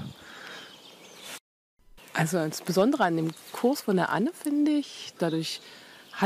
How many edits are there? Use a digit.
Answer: 2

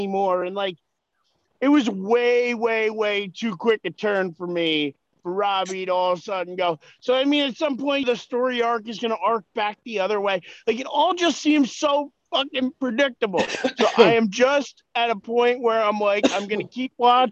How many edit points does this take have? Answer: 1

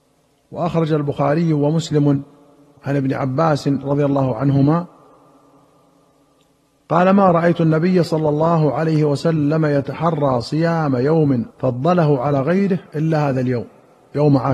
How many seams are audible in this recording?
1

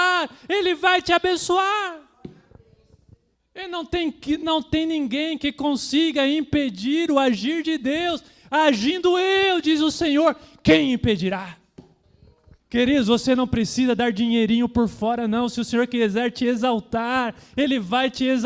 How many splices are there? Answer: 1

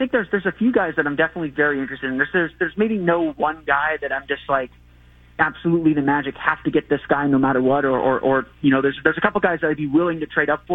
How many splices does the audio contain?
0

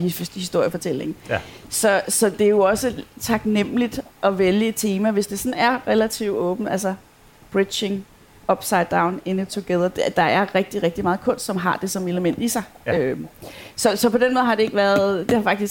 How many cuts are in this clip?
0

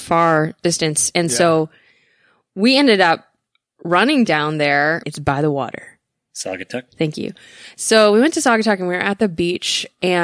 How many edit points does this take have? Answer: 1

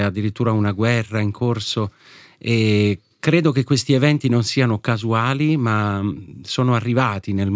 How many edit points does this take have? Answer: 0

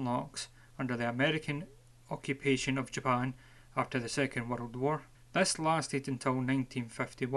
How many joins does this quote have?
1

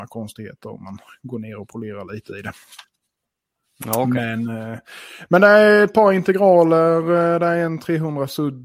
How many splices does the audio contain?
0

